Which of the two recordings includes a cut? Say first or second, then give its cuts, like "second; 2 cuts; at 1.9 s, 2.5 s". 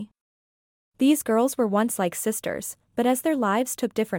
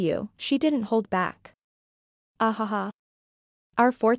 second; 1 cut; at 2.3 s